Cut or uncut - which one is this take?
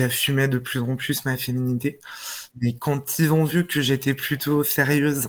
cut